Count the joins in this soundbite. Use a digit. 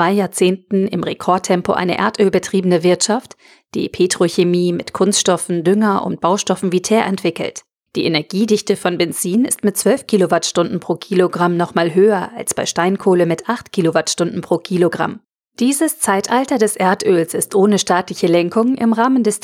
2